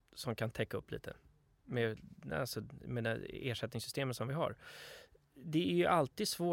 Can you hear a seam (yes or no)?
no